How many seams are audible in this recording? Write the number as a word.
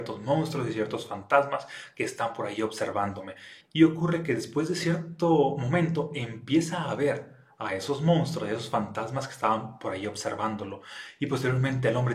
one